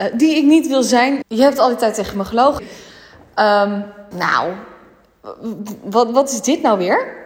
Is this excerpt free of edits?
no; 3 cuts; at 1.2 s, 2.6 s, 4.1 s

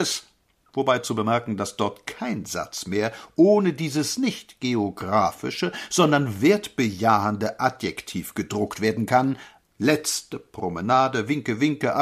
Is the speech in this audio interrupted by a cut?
yes; 1 cut; at 9.6 s

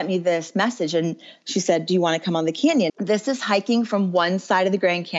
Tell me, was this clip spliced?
yes; 1 cut; at 2.9 s

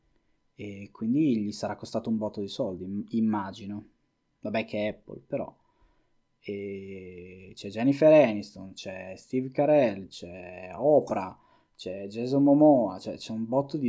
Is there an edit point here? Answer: no; 0 cuts

